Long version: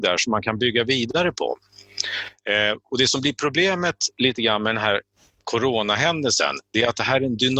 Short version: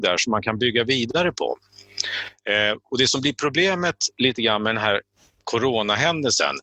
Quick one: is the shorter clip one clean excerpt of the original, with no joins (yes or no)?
yes